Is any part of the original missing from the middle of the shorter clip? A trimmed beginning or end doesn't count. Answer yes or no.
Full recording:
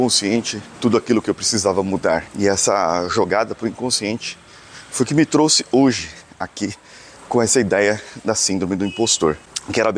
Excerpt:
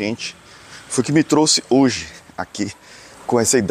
no